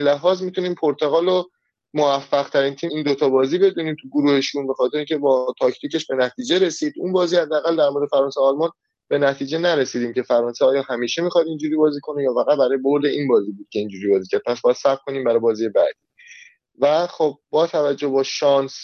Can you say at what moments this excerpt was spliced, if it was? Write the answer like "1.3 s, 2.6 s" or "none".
2.9 s